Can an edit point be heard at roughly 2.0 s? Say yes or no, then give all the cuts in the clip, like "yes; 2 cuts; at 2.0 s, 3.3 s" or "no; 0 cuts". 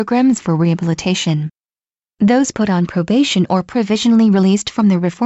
no; 0 cuts